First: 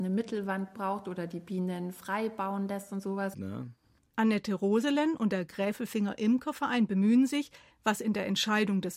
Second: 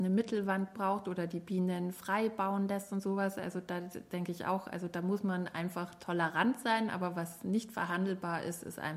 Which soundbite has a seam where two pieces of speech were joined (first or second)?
first